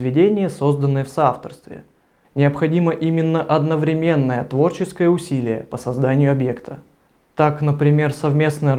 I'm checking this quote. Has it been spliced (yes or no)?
yes